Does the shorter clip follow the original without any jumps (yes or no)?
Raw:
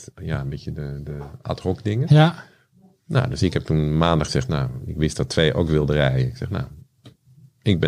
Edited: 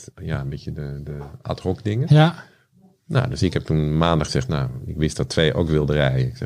yes